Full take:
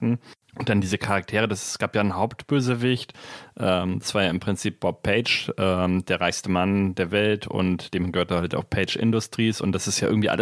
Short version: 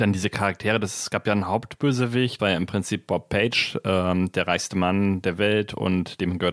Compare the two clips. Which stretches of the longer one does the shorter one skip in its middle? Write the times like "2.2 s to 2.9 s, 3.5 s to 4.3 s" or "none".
3.1 s to 4.1 s